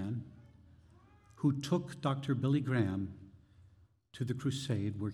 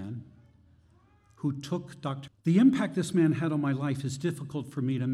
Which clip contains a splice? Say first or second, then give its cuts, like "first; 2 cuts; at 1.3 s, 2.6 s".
second; 1 cut; at 2.3 s